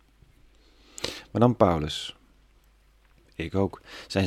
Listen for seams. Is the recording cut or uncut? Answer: cut